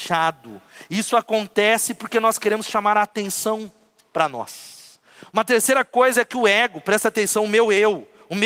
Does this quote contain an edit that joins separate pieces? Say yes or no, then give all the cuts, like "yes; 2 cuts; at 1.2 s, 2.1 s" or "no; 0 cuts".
no; 0 cuts